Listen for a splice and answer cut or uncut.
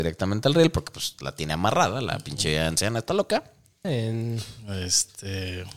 cut